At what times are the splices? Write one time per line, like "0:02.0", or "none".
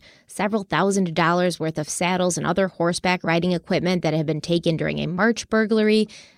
none